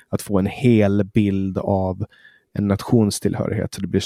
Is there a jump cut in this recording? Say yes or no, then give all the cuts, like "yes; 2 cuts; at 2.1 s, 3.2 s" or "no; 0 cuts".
no; 0 cuts